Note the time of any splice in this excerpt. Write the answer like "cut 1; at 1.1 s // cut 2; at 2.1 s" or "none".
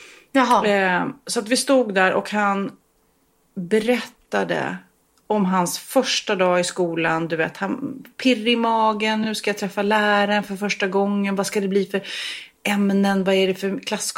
none